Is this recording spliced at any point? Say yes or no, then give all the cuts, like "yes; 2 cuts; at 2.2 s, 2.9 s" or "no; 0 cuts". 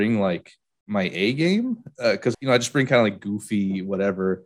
yes; 1 cut; at 2.3 s